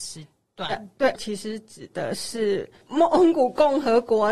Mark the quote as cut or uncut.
cut